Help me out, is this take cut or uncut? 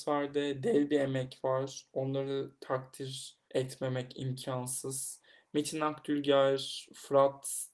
cut